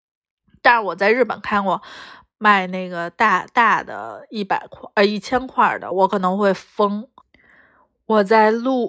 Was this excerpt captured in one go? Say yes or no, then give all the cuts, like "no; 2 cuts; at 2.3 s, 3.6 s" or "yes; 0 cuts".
no; 1 cut; at 5.9 s